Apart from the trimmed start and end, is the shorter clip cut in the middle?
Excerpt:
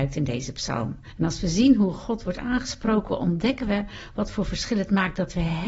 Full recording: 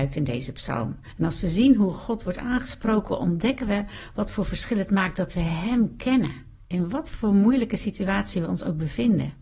no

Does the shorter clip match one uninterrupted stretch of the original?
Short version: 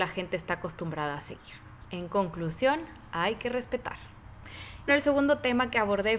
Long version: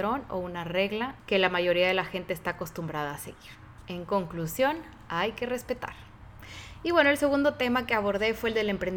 no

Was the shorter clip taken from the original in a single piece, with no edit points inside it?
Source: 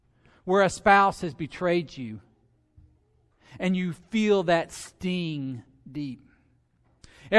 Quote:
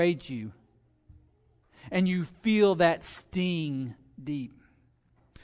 yes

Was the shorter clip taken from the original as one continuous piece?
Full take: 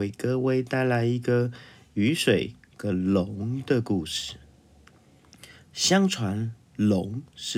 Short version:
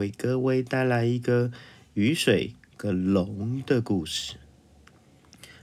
yes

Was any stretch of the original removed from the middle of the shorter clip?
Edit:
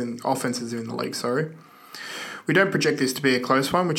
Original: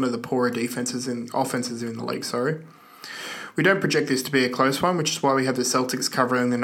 no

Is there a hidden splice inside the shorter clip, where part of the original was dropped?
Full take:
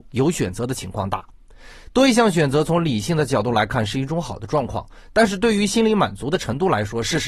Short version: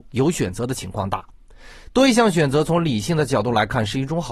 no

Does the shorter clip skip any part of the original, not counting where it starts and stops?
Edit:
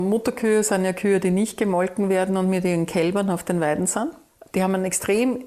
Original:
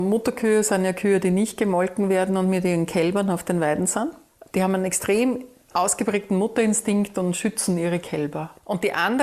no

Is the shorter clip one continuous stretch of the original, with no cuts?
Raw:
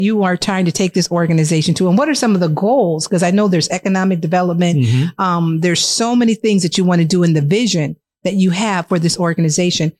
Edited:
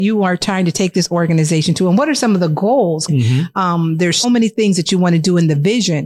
no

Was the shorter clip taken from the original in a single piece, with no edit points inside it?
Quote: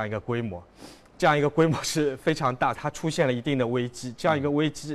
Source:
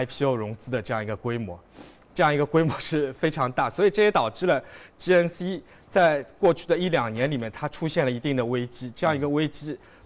no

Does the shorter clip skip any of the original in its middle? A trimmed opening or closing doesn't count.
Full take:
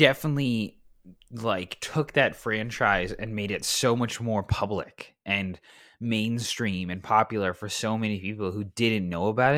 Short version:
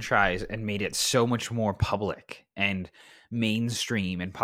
no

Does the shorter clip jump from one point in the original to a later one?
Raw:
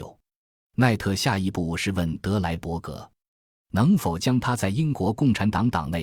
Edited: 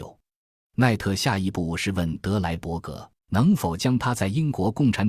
yes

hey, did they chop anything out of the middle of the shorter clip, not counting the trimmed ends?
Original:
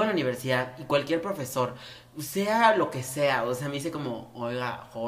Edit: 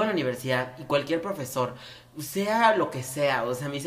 no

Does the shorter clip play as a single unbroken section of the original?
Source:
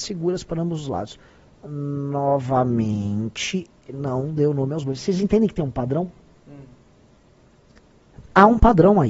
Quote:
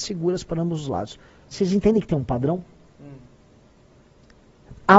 no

